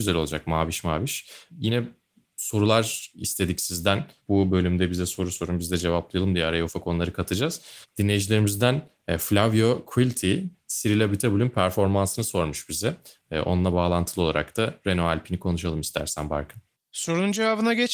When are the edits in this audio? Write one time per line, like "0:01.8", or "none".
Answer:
0:06.7